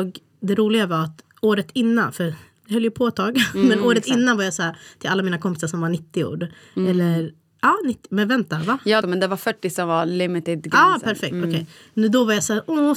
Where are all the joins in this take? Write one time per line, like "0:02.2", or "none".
0:09.0